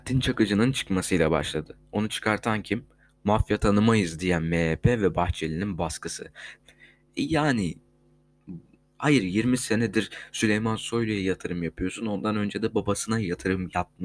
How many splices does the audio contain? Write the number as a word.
one